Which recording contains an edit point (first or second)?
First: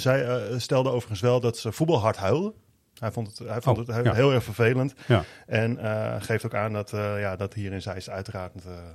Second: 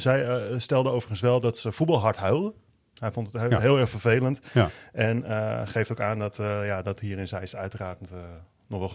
second